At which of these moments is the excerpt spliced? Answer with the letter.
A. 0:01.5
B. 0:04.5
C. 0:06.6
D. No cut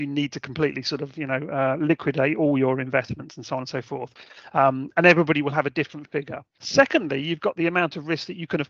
C